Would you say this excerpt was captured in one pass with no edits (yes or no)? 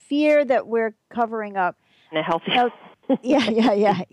no